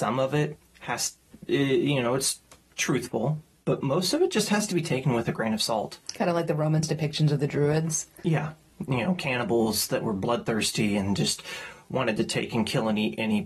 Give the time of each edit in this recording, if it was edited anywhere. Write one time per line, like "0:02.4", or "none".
none